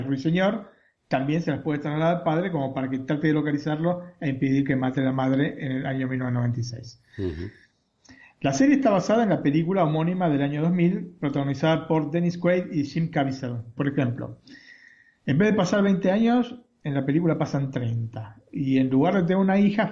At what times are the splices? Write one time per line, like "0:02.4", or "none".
0:13.8